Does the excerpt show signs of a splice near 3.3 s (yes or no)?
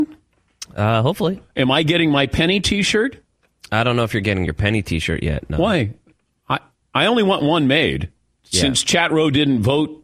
no